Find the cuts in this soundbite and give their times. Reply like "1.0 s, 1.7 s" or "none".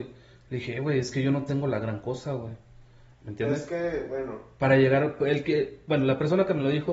3.1 s